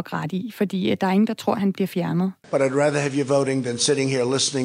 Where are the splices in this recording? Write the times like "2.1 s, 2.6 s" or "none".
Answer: 2.4 s